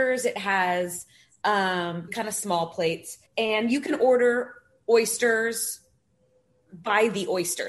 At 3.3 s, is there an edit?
yes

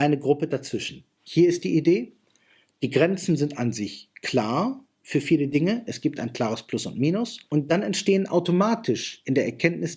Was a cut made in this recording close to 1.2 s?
yes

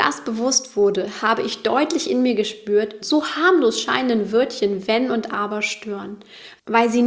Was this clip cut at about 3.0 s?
yes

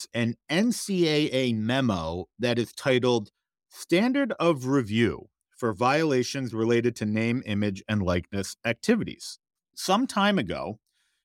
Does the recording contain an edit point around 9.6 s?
yes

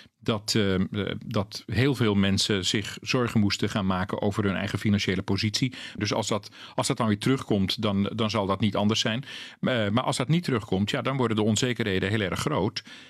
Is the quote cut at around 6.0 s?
yes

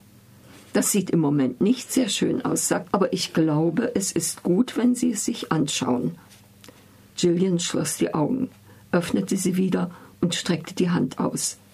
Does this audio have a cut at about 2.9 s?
yes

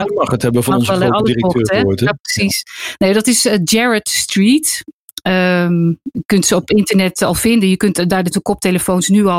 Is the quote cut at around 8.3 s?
yes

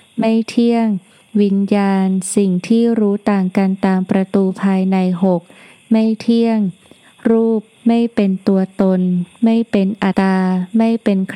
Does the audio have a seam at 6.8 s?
no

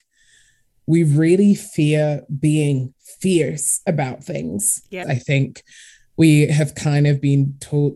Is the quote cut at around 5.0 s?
yes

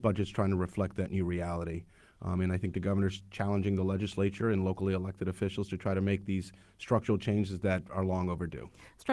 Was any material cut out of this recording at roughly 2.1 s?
no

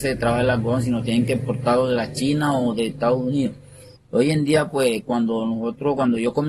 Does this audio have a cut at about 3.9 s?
yes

